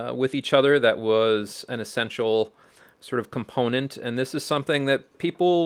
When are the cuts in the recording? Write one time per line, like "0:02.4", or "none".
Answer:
none